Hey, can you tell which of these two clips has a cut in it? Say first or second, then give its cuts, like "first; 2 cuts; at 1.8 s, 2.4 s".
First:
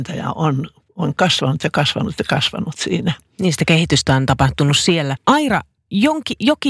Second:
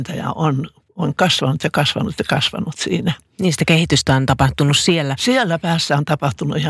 first; 1 cut; at 5.2 s